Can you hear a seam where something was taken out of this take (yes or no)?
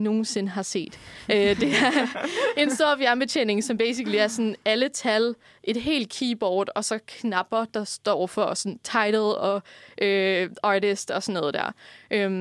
no